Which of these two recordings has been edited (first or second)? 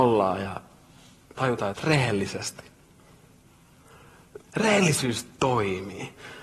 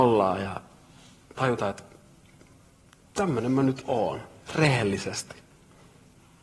first